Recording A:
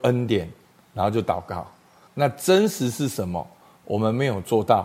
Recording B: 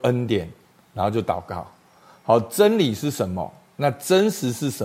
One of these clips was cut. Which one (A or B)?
A